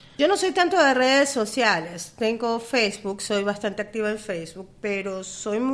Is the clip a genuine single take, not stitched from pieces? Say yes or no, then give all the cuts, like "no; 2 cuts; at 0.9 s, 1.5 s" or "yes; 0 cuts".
yes; 0 cuts